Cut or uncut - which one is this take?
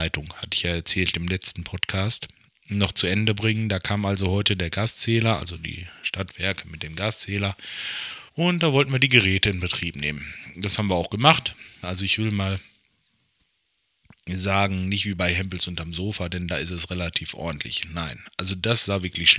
cut